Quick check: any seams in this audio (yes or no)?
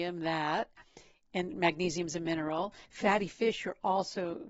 yes